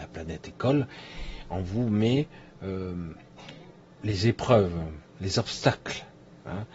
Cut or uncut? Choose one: uncut